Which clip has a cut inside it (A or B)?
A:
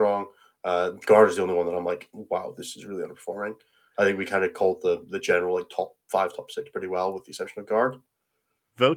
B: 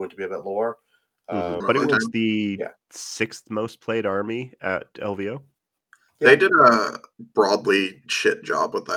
B